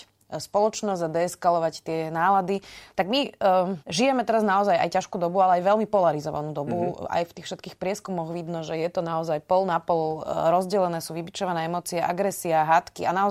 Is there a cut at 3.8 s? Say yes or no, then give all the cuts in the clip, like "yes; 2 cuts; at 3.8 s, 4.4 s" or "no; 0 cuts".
yes; 1 cut; at 3.8 s